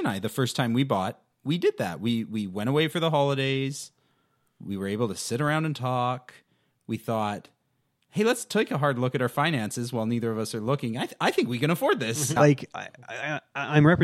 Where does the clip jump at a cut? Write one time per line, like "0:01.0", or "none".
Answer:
0:12.4